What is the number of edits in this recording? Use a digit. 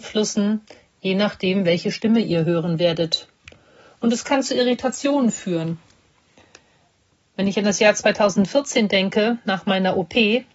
0